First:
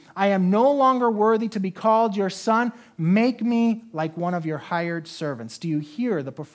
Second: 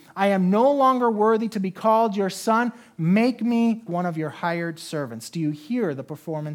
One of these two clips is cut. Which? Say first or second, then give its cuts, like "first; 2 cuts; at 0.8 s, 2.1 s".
second; 1 cut; at 3.9 s